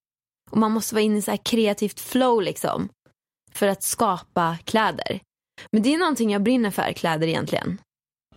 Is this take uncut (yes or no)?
yes